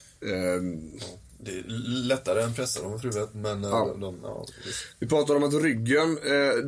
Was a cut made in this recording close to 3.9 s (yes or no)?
no